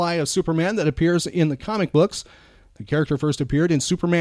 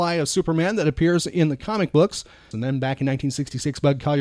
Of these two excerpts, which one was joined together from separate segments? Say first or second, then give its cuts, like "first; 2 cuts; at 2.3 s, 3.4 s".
second; 1 cut; at 2.5 s